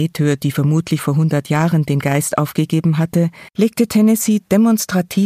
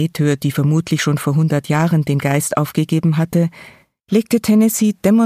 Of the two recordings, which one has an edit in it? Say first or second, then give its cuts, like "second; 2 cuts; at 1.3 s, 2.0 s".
first; 2 cuts; at 1.0 s, 3.5 s